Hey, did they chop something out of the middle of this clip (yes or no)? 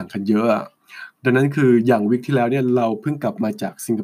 no